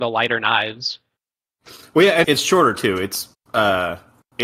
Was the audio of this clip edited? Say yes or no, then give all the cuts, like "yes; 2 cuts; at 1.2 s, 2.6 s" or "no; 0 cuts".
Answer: yes; 1 cut; at 2.2 s